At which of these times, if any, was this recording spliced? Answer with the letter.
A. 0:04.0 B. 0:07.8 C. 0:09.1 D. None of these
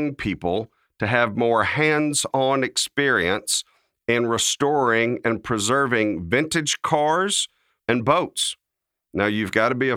B